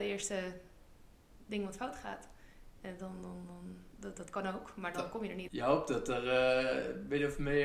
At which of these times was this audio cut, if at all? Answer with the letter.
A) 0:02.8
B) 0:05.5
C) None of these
B